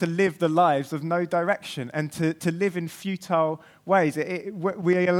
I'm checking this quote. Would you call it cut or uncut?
uncut